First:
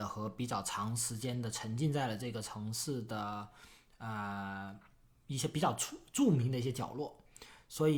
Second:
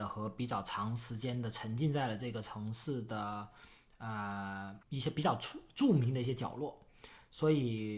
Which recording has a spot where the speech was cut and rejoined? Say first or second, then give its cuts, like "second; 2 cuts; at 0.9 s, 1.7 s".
second; 1 cut; at 4.8 s